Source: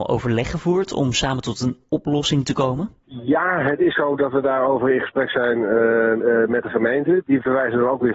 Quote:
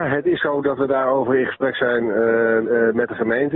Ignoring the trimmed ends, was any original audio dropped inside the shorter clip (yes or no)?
no